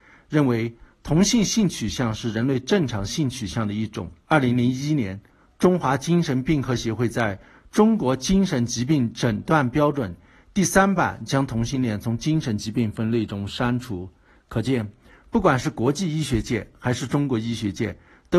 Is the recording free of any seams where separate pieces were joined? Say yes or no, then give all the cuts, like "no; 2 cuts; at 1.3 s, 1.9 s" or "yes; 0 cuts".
no; 1 cut; at 4.2 s